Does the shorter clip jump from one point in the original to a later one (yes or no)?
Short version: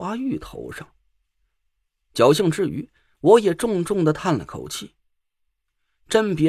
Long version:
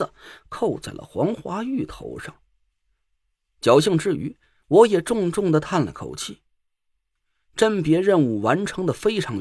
no